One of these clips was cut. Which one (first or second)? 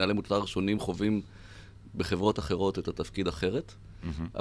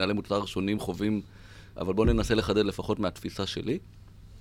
second